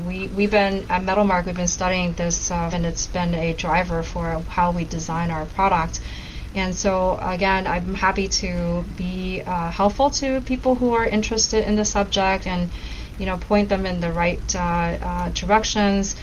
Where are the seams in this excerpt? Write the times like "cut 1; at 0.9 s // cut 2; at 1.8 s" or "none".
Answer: cut 1; at 2.7 s